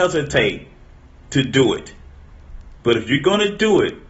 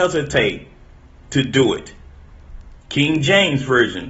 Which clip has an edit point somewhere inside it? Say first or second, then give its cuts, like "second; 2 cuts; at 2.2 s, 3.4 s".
second; 1 cut; at 2.8 s